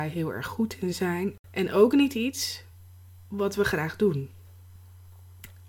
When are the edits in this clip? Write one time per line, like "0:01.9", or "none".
none